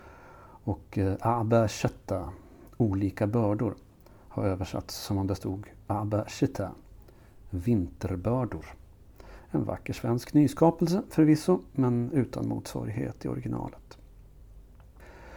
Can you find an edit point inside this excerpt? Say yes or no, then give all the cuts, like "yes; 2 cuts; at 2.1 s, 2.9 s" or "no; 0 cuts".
no; 0 cuts